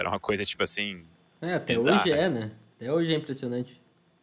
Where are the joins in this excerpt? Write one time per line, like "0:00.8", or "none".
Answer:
none